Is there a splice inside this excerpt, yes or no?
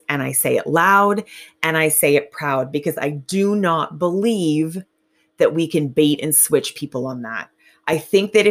no